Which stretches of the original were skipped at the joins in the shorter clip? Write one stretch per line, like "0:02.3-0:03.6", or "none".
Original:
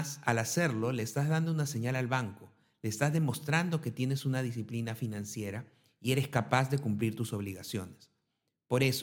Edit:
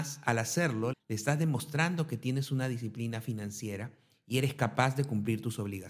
0:00.9-0:02.7